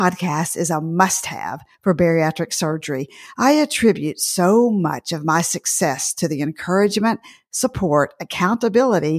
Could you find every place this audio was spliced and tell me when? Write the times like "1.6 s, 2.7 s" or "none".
none